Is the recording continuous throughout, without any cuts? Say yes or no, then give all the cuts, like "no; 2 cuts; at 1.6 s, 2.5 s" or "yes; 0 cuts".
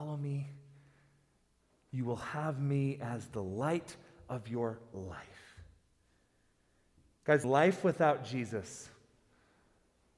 no; 1 cut; at 7.4 s